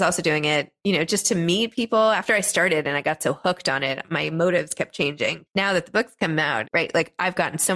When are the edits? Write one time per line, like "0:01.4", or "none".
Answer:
0:05.5
0:06.7

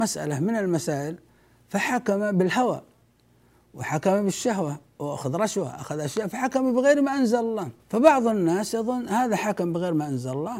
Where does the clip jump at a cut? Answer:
0:07.8

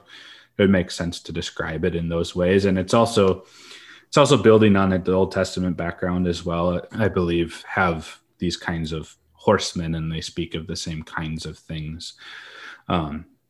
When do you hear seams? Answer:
0:06.9

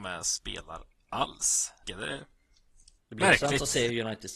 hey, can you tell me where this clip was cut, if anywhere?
0:01.8
0:03.0

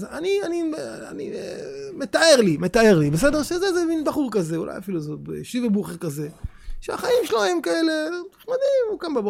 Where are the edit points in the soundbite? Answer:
none

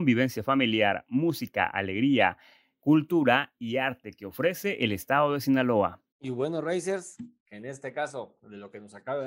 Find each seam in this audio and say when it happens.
0:06.1
0:07.4

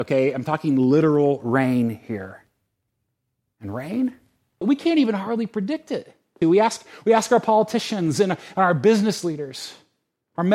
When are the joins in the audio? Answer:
0:04.6
0:06.4

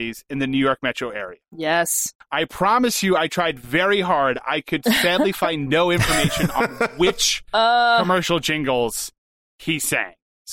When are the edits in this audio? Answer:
none

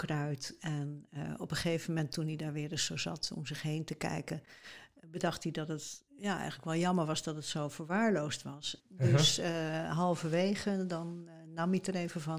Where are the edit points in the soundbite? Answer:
0:06.1
0:08.8

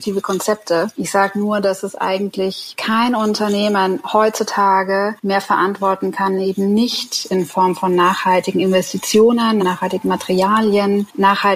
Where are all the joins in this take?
0:09.6

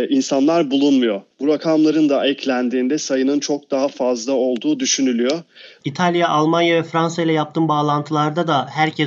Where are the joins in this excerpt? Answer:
0:05.8

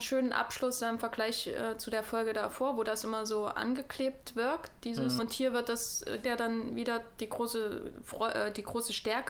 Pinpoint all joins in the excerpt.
0:05.2
0:06.2

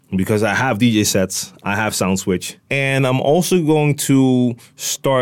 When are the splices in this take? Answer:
0:02.6

